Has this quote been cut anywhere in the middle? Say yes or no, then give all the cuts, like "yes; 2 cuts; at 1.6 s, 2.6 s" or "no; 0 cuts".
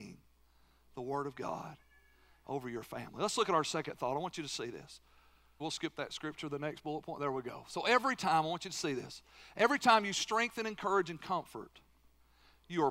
yes; 1 cut; at 5.6 s